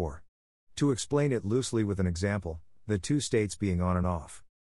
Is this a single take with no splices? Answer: no; 1 cut; at 2.8 s

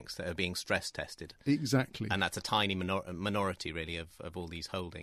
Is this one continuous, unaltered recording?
yes; 0 cuts

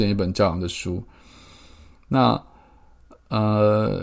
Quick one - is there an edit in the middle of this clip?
no; 0 cuts

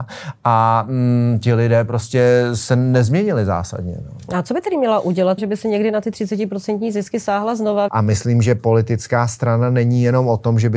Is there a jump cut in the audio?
yes; 2 cuts; at 5.4 s, 7.9 s

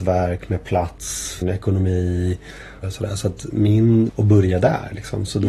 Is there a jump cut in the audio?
yes; 3 cuts; at 1.4 s, 2.8 s, 4.1 s

